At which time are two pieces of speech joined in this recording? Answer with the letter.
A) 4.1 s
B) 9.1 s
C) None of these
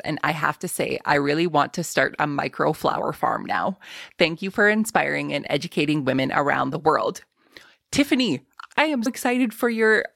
B